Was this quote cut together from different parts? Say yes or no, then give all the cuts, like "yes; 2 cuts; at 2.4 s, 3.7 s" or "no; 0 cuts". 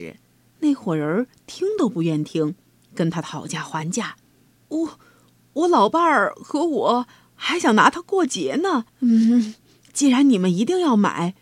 yes; 2 cuts; at 4.6 s, 8.9 s